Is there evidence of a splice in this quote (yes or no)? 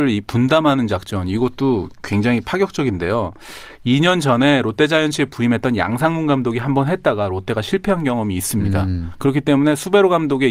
no